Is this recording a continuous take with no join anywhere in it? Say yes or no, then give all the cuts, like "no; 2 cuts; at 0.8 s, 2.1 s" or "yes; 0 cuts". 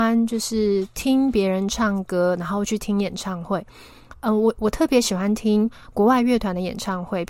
yes; 0 cuts